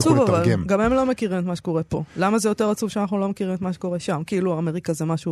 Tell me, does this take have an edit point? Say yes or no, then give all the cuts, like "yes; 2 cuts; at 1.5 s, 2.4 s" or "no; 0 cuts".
no; 0 cuts